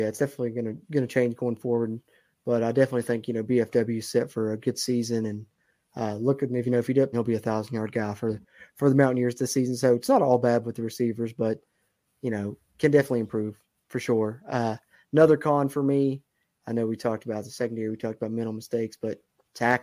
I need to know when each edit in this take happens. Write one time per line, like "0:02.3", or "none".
0:07.1